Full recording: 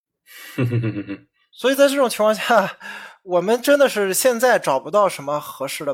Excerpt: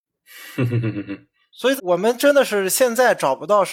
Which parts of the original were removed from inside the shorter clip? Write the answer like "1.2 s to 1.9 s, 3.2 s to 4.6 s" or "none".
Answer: 1.8 s to 3.2 s

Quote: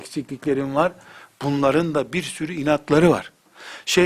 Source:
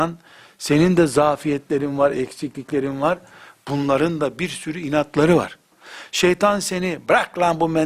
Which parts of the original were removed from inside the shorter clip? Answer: none

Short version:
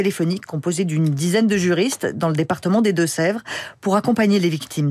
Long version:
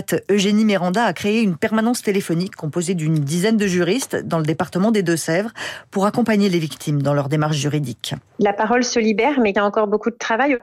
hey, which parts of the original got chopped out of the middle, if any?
none

